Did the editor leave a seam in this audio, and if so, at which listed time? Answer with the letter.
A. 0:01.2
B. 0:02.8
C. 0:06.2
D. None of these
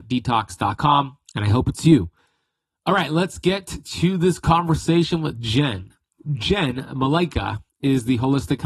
A